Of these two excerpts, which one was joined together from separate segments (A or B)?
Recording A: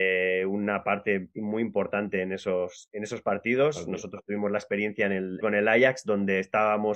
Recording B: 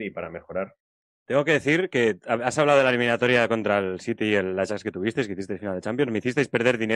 A